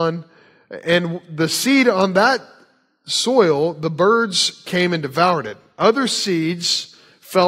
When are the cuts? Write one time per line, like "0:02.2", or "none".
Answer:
none